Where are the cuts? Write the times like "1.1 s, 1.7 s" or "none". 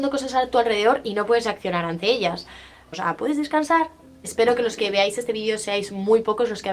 2.9 s